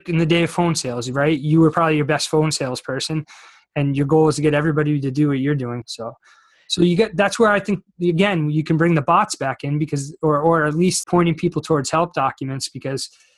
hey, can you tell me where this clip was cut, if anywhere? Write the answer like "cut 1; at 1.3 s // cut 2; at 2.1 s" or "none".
cut 1; at 5.8 s // cut 2; at 11.0 s